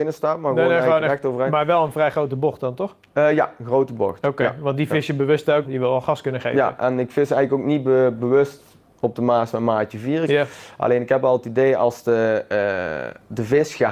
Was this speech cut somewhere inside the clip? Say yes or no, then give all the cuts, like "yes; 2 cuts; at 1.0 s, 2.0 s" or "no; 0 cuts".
yes; 2 cuts; at 5.6 s, 10.3 s